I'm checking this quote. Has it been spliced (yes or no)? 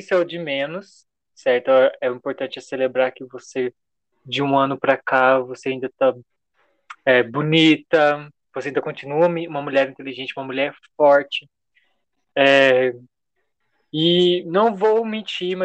no